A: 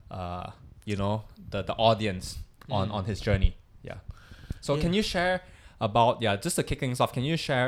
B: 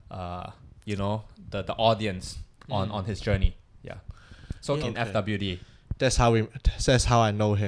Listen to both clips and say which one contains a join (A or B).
B